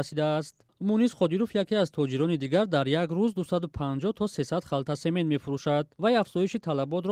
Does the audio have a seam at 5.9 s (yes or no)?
yes